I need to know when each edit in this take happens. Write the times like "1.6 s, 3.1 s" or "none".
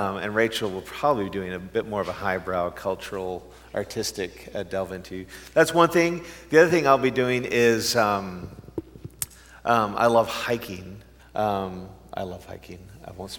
11.2 s